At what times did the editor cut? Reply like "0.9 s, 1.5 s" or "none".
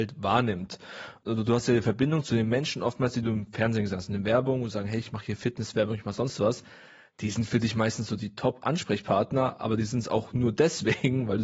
none